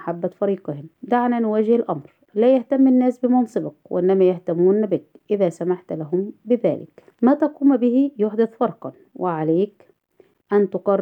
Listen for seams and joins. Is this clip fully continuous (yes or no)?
no